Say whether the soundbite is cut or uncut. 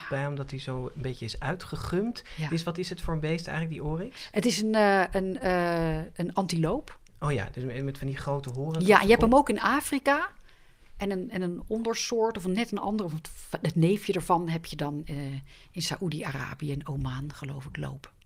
uncut